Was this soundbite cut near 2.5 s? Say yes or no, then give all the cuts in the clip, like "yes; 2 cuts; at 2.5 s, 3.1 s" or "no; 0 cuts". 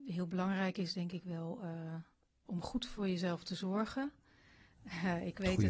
yes; 1 cut; at 2.5 s